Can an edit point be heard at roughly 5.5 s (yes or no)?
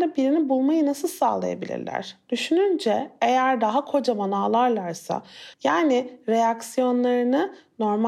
yes